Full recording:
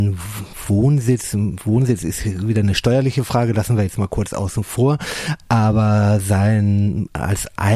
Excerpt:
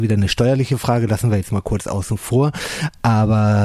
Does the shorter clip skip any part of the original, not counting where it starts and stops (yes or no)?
no